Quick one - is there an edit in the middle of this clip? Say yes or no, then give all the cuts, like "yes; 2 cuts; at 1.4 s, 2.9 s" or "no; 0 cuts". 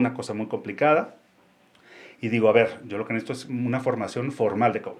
no; 0 cuts